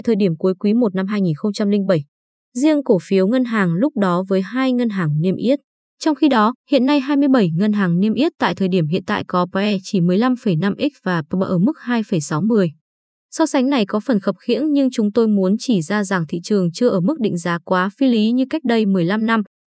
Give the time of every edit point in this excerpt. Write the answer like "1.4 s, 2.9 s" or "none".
5.9 s